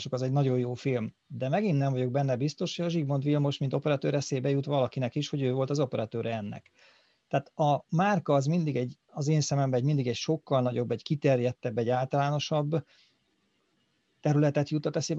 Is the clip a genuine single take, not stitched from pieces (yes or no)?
yes